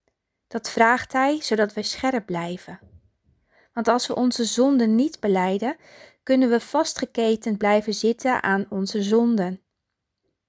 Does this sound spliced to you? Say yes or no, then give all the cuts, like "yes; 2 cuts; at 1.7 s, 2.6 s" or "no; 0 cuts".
no; 0 cuts